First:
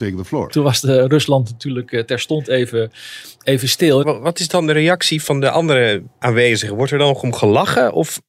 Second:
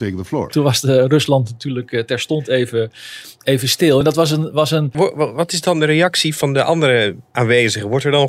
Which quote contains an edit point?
first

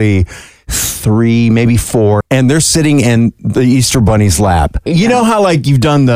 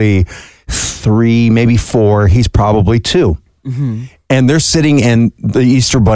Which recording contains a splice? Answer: first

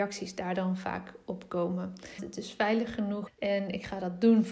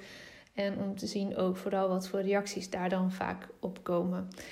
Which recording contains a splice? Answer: first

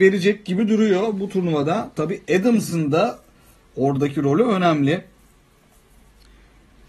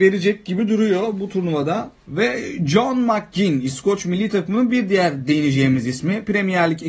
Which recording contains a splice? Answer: second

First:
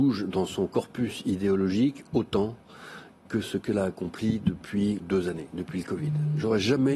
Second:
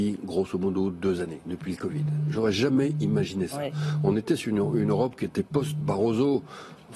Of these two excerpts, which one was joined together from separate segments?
first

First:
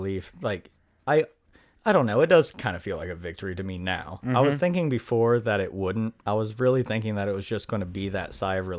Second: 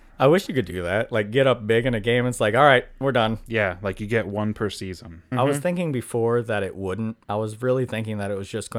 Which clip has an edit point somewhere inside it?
second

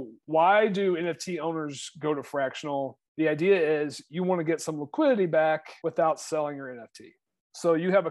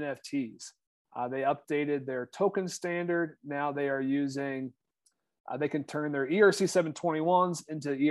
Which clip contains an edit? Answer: first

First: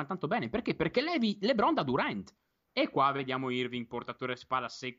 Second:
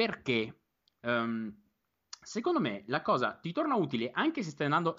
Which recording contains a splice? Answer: first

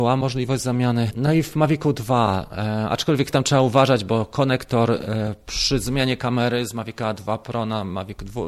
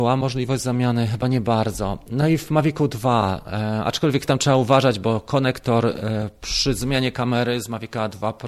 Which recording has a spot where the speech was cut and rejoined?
first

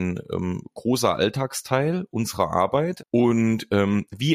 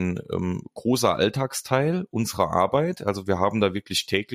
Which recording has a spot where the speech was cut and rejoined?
first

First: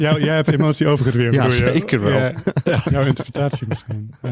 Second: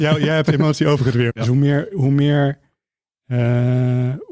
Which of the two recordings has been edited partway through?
second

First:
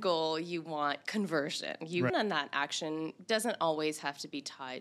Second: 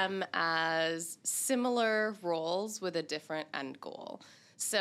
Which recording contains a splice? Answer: first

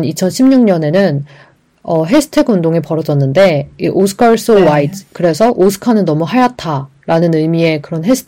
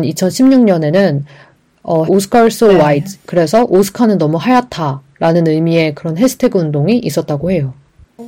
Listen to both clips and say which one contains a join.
second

